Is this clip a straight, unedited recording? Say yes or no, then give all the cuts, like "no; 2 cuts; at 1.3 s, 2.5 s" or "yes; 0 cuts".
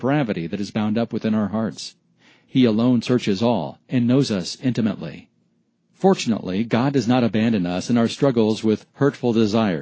yes; 0 cuts